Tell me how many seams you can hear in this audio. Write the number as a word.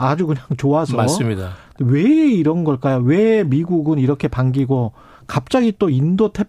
one